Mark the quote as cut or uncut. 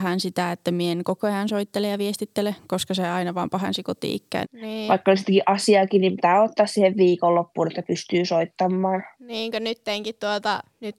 cut